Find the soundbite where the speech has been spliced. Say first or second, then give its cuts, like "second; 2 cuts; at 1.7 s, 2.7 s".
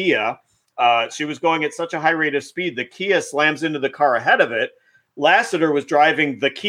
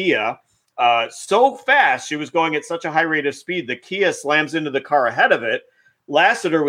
first; 1 cut; at 1.1 s